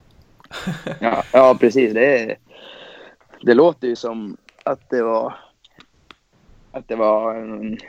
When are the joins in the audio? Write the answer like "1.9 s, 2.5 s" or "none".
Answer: none